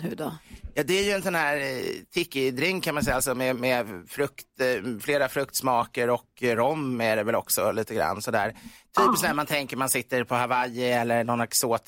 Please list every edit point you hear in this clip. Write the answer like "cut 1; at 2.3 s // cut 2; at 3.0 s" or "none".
none